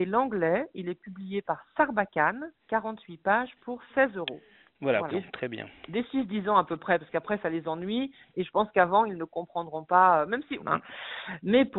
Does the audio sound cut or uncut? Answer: cut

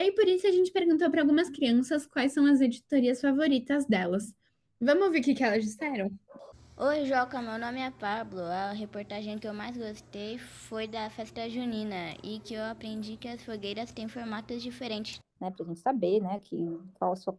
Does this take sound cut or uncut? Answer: cut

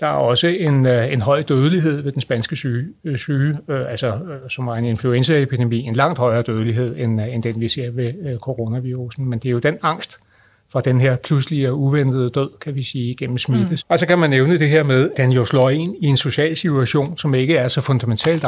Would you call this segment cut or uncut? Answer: cut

